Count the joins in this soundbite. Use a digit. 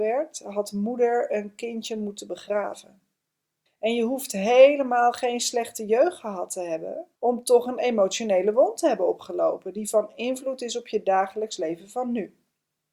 2